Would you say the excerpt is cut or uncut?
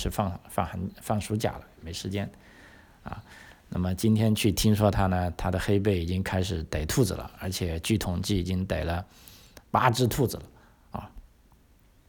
uncut